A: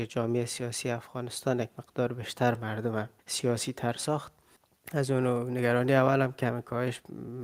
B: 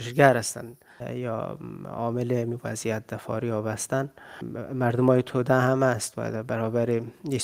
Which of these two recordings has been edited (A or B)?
A